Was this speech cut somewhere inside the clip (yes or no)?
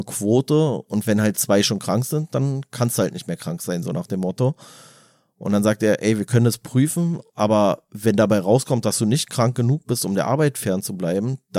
no